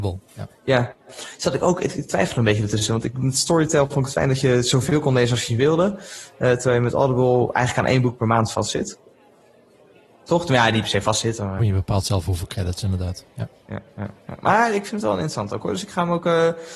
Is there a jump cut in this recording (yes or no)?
yes